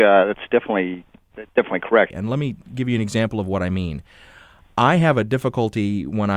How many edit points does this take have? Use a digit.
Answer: 1